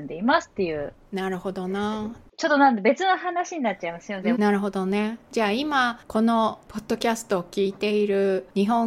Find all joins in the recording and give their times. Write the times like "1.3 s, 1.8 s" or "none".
4.4 s